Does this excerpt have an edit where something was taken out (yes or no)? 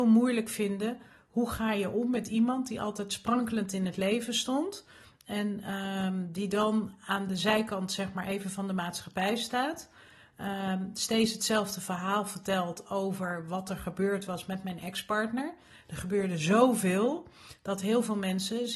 no